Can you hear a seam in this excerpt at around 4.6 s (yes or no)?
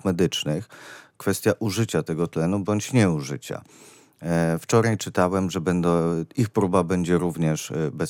no